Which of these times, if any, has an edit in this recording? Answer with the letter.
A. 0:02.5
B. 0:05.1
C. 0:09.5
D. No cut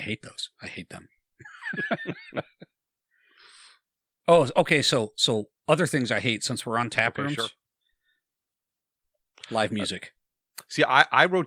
D